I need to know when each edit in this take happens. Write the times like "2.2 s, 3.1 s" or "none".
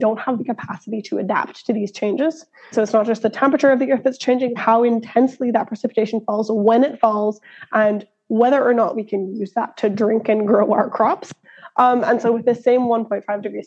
2.7 s, 4.6 s